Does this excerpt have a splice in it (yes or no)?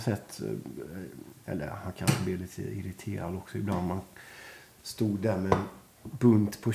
yes